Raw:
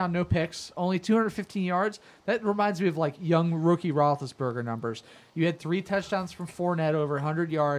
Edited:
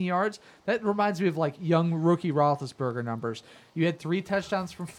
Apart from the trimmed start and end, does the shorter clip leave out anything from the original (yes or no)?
no